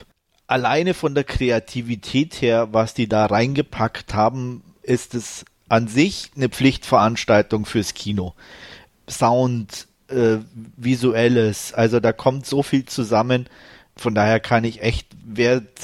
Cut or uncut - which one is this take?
uncut